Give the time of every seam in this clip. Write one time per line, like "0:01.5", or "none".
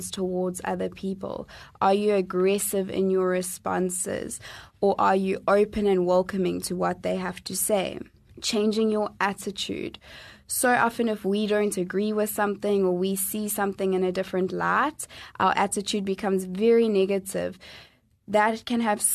none